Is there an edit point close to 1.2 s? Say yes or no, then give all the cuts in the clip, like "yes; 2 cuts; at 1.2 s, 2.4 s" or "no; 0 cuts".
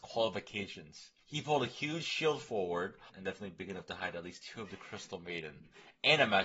yes; 2 cuts; at 1.2 s, 3.1 s